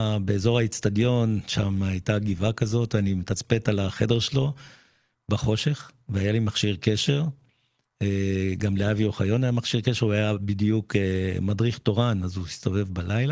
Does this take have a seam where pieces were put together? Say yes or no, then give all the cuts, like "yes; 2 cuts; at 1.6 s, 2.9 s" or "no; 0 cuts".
no; 0 cuts